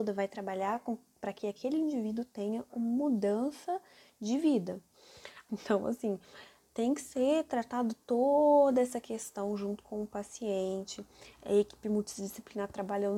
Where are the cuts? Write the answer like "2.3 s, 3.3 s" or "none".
5.5 s